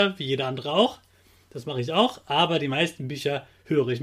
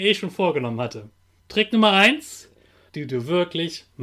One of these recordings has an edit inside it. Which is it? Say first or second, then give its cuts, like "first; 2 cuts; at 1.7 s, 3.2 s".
second; 2 cuts; at 1.4 s, 2.9 s